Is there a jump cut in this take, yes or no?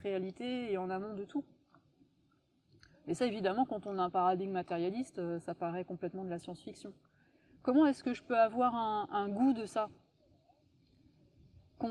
no